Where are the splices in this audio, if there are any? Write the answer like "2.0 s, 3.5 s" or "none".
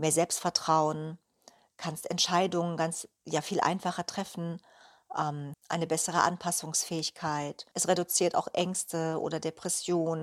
5.5 s, 7.7 s